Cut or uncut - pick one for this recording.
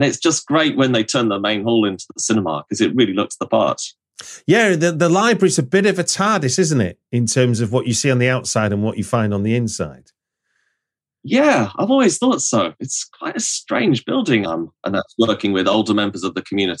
cut